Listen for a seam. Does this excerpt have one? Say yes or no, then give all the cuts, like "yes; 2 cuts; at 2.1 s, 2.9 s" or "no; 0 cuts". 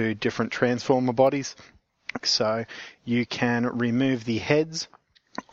yes; 1 cut; at 2.2 s